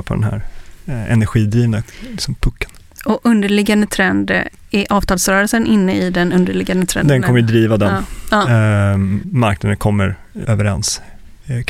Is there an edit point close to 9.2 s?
yes; 2 cuts; at 9.2 s, 10.4 s

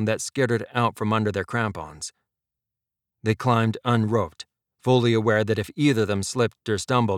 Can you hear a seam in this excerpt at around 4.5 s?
no; 0 cuts

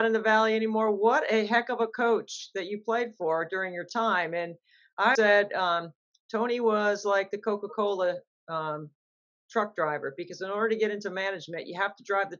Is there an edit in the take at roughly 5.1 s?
yes; 1 cut; at 5.1 s

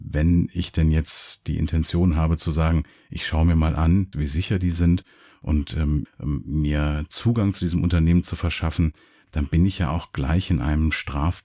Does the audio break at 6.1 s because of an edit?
yes; 2 cuts; at 4.1 s, 6.1 s

